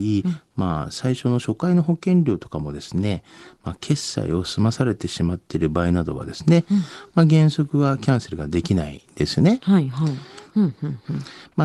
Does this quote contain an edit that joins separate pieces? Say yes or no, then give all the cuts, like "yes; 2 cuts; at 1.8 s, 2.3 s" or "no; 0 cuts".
yes; 1 cut; at 10.5 s